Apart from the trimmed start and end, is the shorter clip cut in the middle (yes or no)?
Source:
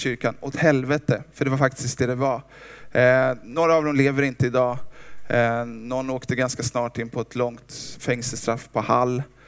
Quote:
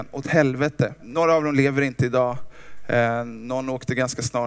yes